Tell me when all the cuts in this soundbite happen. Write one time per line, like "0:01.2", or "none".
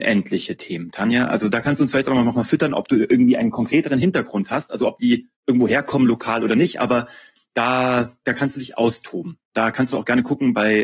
0:05.4